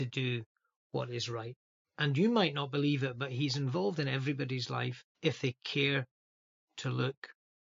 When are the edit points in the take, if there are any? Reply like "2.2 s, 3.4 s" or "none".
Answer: 1.8 s, 5.1 s